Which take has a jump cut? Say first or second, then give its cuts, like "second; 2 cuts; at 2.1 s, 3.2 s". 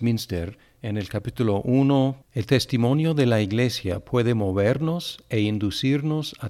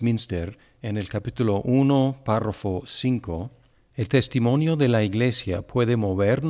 first; 1 cut; at 2.2 s